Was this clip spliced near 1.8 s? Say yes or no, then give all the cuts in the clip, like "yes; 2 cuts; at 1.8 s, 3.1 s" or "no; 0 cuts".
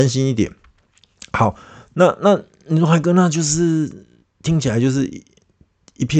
no; 0 cuts